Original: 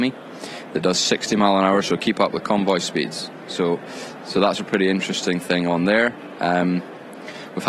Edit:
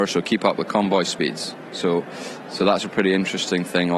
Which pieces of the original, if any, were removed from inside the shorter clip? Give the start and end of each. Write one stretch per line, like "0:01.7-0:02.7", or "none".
none